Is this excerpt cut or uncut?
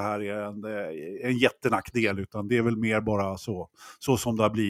uncut